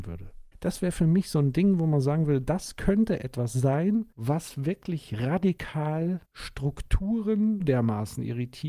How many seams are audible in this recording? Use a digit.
2